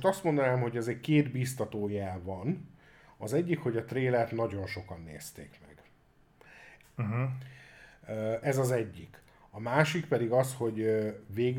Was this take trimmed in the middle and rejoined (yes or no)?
yes